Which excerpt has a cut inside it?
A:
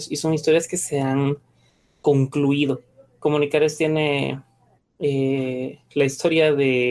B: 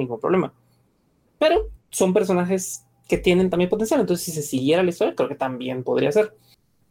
B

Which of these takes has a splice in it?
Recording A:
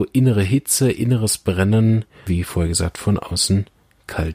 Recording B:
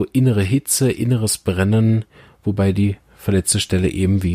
A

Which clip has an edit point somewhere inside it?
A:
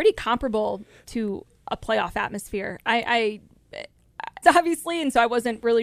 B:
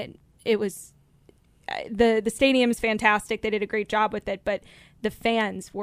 A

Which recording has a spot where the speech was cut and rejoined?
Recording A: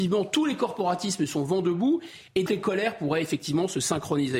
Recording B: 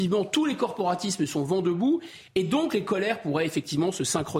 A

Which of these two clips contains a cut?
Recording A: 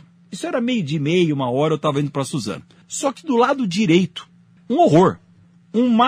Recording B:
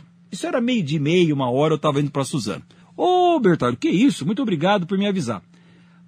A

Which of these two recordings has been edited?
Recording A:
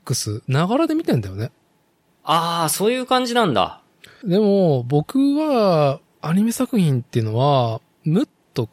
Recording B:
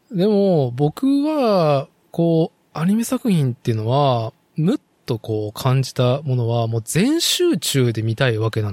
A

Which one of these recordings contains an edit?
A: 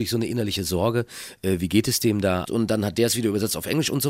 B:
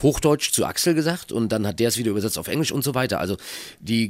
A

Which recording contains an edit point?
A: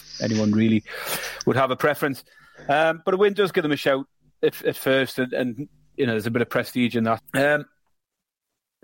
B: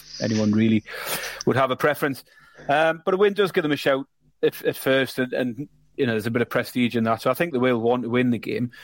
A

